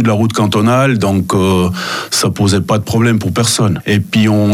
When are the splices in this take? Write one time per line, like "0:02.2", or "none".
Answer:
none